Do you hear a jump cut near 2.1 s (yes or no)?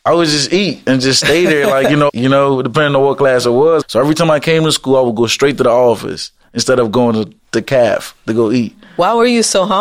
yes